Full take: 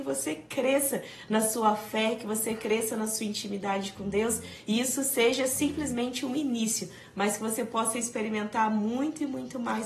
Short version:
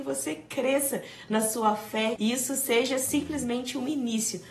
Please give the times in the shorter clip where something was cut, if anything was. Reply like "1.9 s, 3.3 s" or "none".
2.2 s